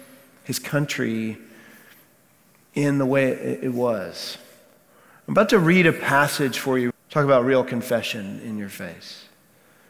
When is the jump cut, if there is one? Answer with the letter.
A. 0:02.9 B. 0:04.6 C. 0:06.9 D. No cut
C